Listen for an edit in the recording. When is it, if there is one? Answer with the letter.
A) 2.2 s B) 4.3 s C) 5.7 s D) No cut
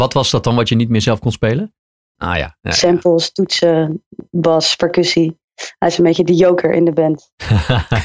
A